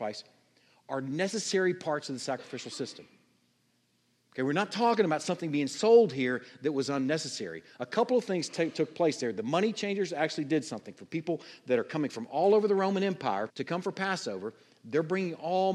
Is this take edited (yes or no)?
yes